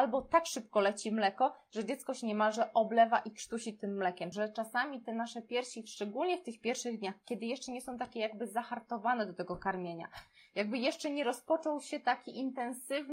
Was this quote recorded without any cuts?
no; 1 cut; at 4.3 s

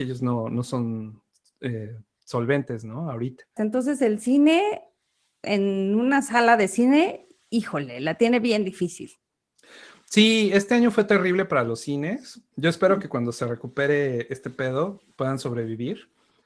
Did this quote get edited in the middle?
yes; 1 cut; at 3.6 s

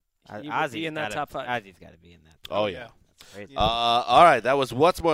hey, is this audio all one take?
yes; 0 cuts

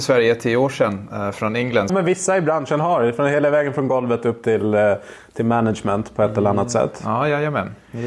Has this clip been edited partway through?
yes; 1 cut; at 1.9 s

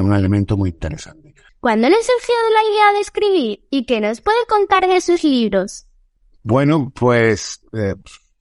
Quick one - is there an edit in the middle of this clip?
yes; 1 cut; at 1.5 s

